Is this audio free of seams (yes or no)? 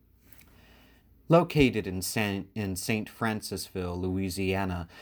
yes